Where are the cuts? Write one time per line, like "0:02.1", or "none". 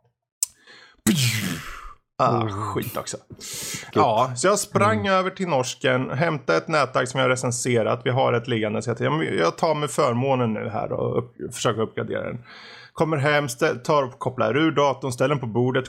0:03.9